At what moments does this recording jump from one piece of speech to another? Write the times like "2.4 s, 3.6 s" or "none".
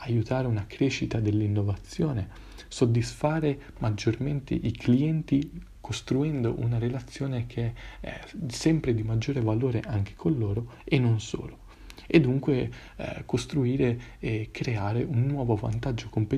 none